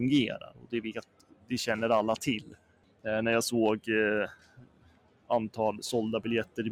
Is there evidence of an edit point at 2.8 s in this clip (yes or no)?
yes